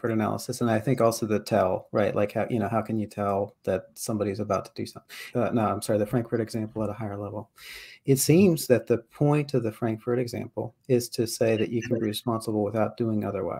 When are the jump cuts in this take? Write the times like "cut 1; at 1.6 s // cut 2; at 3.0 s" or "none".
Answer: cut 1; at 5.3 s